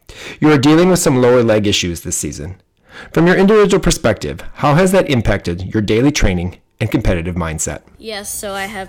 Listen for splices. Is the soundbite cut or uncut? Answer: uncut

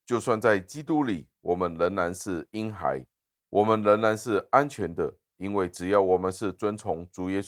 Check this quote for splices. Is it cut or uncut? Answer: uncut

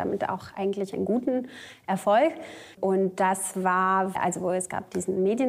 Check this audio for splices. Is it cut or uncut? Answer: cut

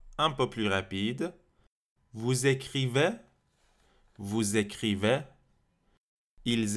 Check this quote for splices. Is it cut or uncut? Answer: cut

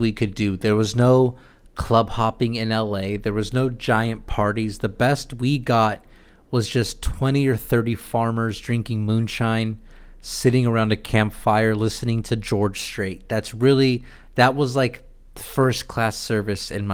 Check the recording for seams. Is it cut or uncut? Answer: uncut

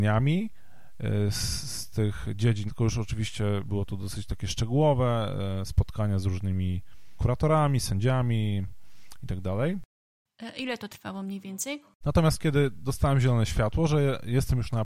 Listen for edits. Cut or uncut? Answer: cut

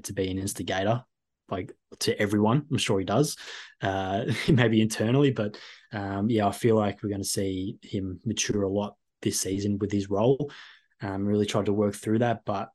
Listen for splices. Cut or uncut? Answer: cut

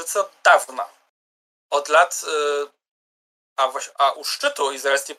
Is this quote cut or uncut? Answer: uncut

